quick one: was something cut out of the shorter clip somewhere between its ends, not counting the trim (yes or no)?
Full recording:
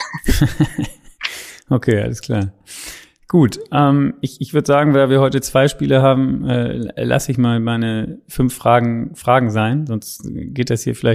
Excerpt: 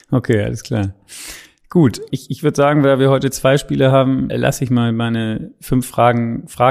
yes